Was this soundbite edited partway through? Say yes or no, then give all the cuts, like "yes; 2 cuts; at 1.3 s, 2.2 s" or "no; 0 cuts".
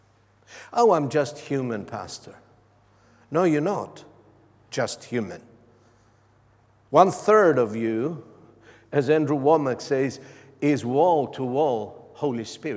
no; 0 cuts